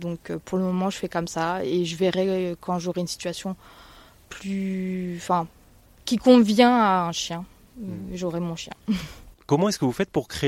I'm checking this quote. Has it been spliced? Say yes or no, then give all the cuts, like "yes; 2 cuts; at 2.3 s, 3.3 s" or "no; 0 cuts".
no; 0 cuts